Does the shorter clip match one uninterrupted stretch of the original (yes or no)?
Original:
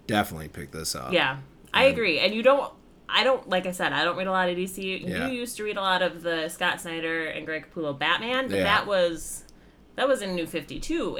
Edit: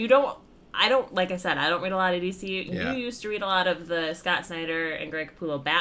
yes